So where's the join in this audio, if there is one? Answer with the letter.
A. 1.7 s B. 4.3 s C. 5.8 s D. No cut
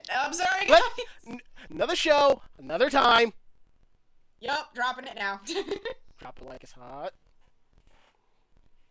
A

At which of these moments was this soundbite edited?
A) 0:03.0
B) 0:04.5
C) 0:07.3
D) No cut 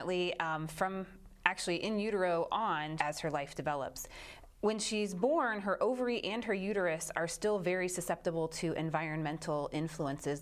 A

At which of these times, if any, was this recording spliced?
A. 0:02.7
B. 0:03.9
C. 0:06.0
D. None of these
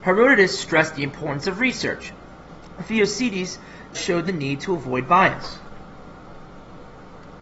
B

